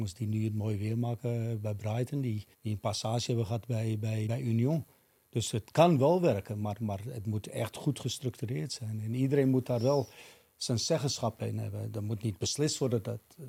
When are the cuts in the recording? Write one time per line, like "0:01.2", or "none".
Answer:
0:02.5
0:04.3